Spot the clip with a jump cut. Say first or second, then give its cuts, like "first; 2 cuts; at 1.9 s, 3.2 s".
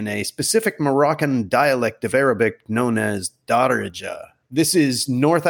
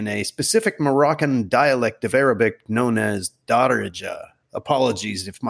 first; 1 cut; at 4.5 s